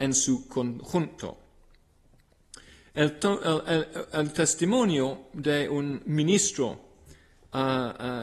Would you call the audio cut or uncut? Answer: uncut